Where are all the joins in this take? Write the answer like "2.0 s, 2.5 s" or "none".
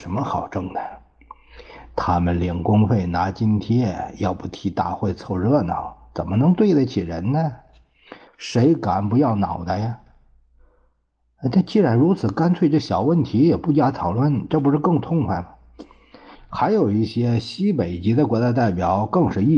8.3 s, 16.4 s